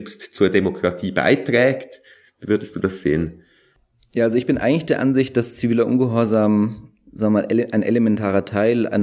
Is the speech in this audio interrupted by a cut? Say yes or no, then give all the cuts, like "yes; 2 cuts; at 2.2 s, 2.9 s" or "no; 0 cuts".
no; 0 cuts